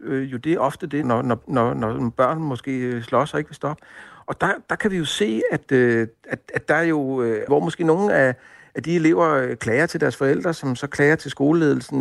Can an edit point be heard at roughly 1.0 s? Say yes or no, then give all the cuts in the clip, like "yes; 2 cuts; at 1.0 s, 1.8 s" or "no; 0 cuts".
yes; 2 cuts; at 1.0 s, 7.5 s